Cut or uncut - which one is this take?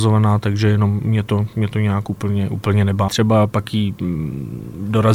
cut